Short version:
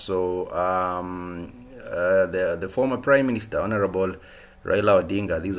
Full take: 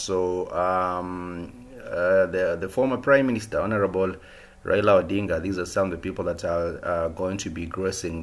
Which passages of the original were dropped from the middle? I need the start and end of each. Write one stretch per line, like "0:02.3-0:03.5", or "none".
none